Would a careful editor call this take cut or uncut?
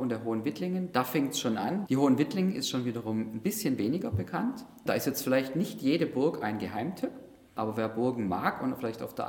cut